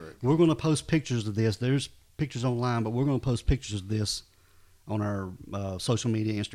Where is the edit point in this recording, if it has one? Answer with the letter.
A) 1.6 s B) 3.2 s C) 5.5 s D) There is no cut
D